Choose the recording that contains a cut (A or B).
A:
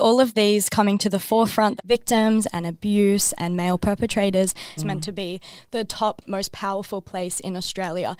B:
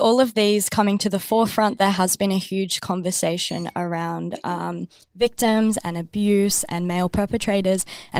A